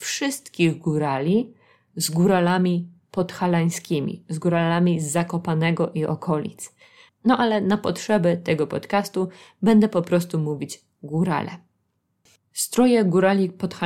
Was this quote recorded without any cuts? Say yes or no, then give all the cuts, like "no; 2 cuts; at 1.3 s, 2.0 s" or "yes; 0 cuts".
no; 1 cut; at 7.1 s